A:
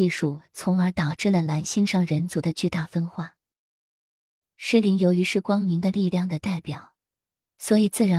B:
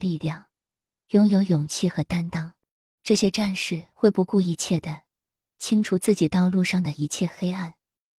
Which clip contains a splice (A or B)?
B